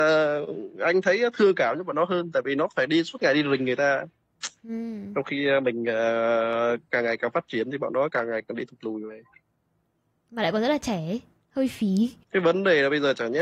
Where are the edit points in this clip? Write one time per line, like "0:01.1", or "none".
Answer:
0:12.2